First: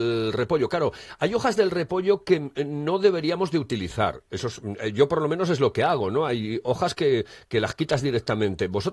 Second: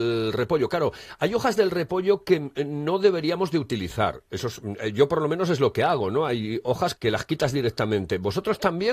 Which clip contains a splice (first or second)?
second